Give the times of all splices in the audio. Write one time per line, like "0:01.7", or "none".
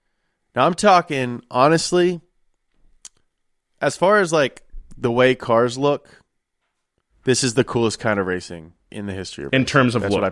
0:08.9